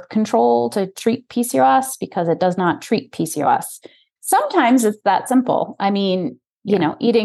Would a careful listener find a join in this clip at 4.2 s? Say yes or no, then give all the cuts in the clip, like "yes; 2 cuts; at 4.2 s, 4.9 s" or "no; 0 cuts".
yes; 1 cut; at 4.2 s